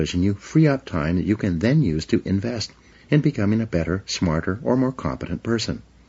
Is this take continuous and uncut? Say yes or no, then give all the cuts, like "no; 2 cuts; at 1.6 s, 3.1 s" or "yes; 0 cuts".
yes; 0 cuts